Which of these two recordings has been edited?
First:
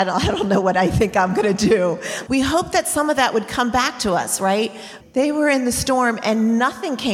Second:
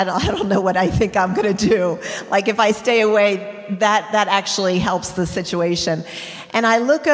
first; 2 cuts; at 2.3 s, 5.0 s

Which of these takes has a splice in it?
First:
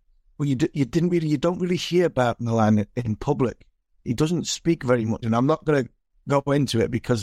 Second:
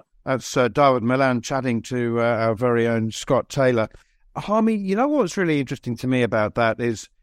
first; 1 cut; at 5.2 s

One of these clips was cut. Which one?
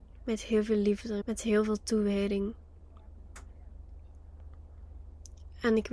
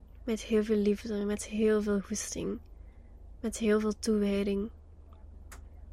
first; 1 cut; at 1.2 s

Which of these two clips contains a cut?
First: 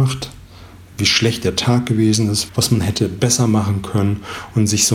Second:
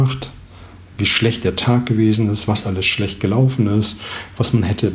first; 1 cut; at 2.5 s

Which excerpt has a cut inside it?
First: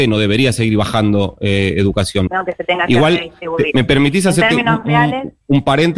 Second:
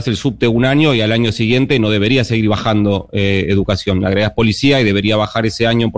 first; 1 cut; at 2.3 s

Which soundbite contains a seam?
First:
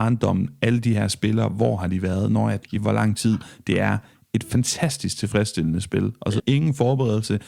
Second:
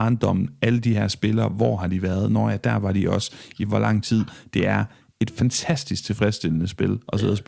first; 2 cuts; at 2.6 s, 6.4 s

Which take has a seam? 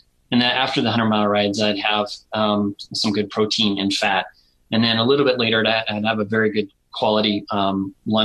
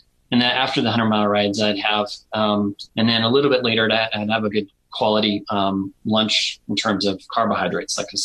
second; 2 cuts; at 2.9 s, 4.5 s

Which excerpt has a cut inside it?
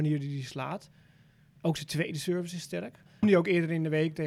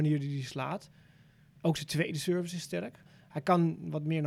first; 1 cut; at 3.2 s

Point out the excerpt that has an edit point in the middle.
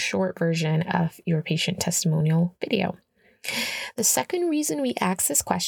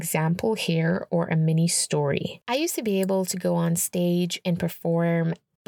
second; 1 cut; at 2.4 s

